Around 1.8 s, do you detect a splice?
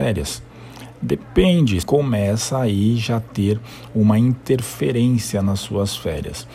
yes; 1 cut; at 1.8 s

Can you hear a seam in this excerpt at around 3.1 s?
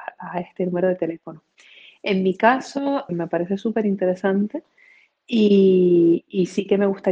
yes; 1 cut; at 3.1 s

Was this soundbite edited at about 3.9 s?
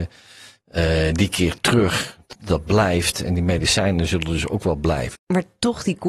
no; 2 cuts; at 2.3 s, 5.2 s

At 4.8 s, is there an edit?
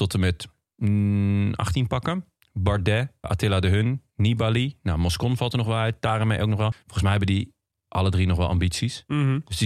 no; 2 cuts; at 3.2 s, 6.7 s

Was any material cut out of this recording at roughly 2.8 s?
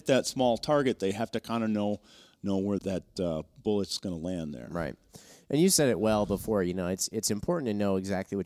yes; 1 cut; at 2.8 s

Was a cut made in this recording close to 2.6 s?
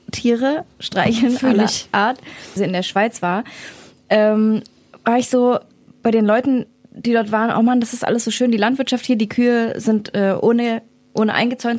yes; 1 cut; at 2.6 s

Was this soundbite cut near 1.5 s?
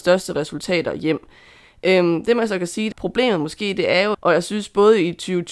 no; 2 cuts; at 2.9 s, 4.1 s

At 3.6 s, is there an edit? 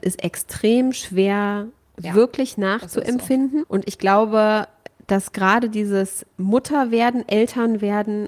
yes; 1 cut; at 3.6 s

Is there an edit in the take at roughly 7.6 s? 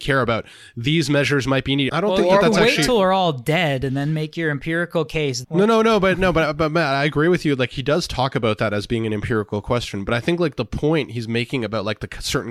no; 2 cuts; at 1.9 s, 5.4 s

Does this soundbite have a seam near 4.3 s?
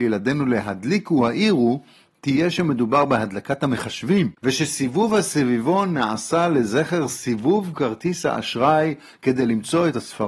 yes; 1 cut; at 4.3 s

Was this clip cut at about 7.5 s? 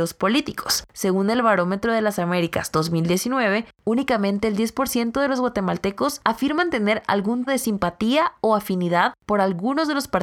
yes; 1 cut; at 7.5 s

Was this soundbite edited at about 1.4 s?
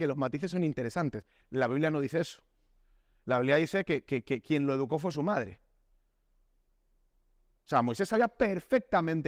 yes; 1 cut; at 1.4 s

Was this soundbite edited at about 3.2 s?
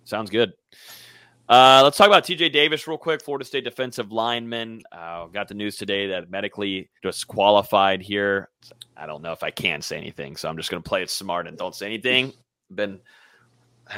no; 2 cuts; at 7.0 s, 8.6 s

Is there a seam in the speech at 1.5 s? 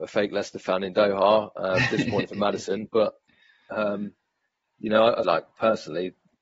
no; 1 cut; at 5.2 s

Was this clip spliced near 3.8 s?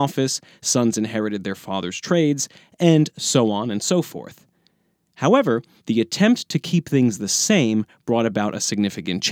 no; 1 cut; at 5.8 s

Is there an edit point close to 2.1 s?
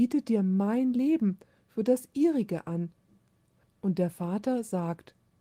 no; 1 cut; at 3.6 s

